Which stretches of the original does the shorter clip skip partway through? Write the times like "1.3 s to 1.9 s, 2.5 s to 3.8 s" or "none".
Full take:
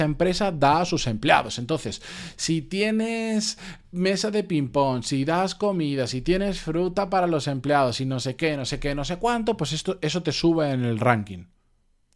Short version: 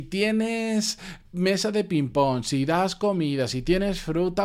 none